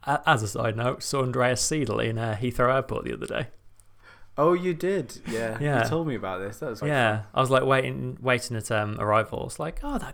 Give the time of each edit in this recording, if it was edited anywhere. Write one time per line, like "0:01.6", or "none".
0:06.8